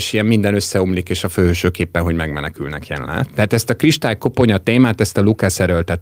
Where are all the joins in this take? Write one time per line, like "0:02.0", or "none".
0:03.3